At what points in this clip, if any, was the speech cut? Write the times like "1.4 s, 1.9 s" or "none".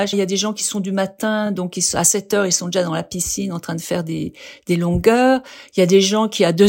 none